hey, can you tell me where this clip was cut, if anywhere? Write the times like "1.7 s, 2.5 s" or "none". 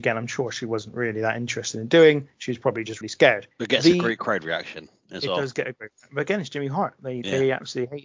3.0 s

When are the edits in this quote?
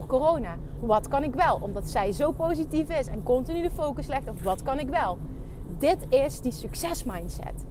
none

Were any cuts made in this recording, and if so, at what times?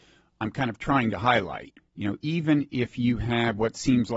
1.8 s

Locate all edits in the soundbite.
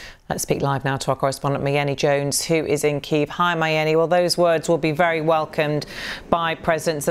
none

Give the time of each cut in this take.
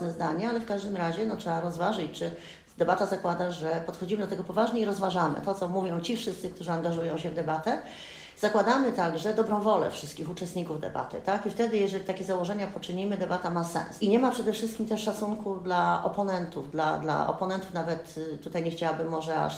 14.0 s, 17.0 s

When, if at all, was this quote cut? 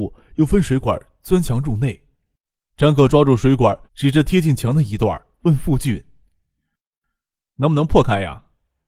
3.9 s

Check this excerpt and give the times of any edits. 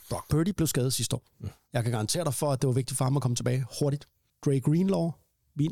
4.3 s

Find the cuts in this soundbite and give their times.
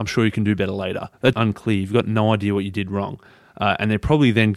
1.3 s

